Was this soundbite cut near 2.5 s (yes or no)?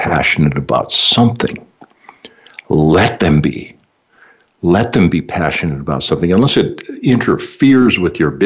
no